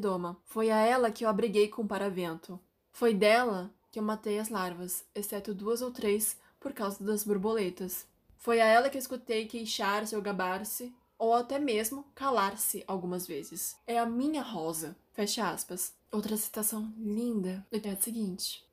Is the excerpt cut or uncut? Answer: cut